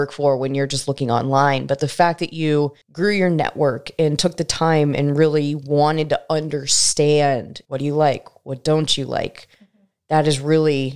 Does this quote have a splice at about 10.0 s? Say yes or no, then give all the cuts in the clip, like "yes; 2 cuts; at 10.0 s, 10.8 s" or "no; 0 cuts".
no; 1 cut; at 2.8 s